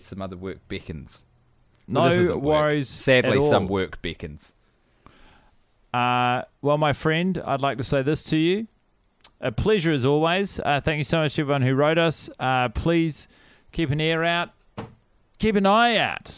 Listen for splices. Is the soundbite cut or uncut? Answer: uncut